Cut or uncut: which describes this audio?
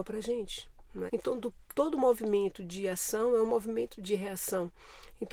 cut